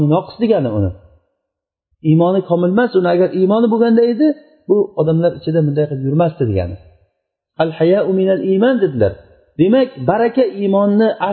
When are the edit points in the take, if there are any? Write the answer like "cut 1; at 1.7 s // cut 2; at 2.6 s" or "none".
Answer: none

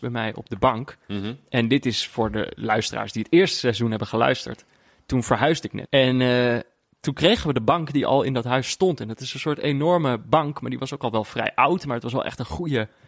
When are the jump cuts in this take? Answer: cut 1; at 5.9 s

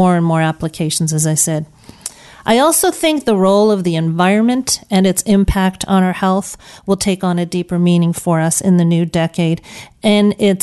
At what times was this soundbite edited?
none

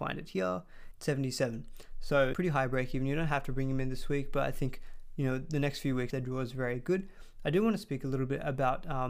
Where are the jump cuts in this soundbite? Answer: cut 1; at 2.3 s // cut 2; at 6.1 s

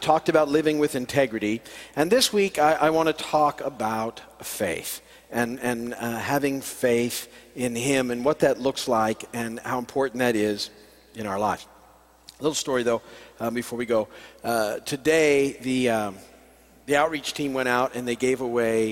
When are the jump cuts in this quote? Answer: none

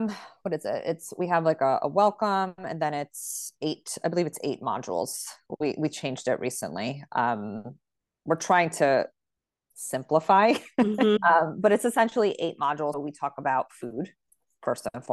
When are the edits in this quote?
cut 1; at 11.2 s // cut 2; at 12.9 s

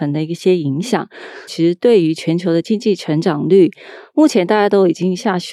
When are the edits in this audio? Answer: cut 1; at 1.5 s

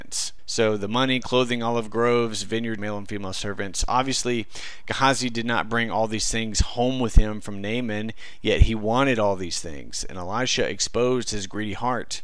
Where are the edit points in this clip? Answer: cut 1; at 2.8 s

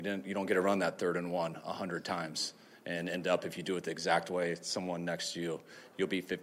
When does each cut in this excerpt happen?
none

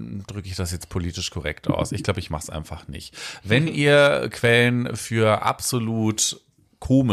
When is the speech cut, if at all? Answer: none

